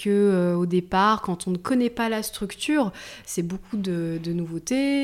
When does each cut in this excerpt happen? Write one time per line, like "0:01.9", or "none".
none